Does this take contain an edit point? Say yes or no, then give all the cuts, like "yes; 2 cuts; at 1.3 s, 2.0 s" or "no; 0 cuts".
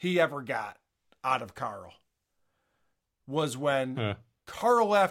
no; 0 cuts